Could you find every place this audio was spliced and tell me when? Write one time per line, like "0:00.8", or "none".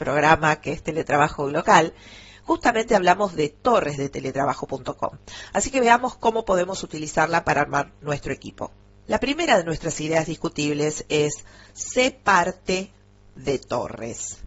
none